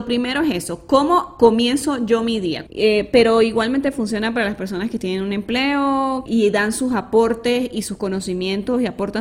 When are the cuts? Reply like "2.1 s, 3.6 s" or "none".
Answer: 2.7 s, 6.3 s